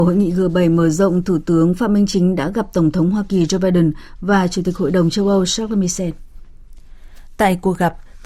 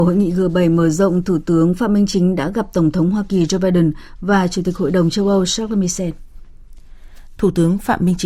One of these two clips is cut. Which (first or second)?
second